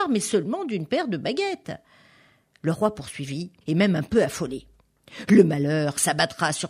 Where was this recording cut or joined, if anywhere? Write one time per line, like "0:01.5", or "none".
0:03.6